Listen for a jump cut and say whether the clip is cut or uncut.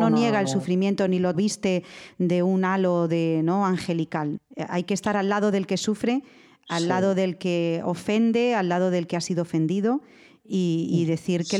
cut